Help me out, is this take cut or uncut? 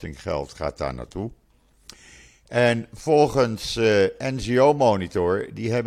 uncut